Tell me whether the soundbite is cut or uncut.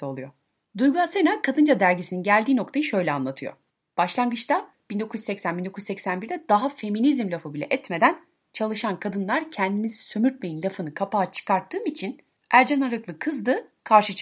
uncut